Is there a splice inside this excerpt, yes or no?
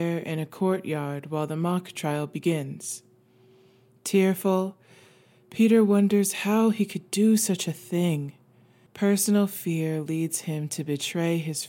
yes